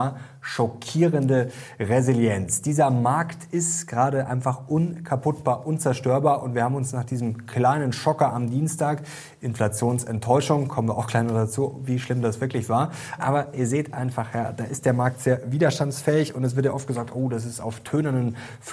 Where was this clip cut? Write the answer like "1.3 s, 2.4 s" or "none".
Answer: 13.2 s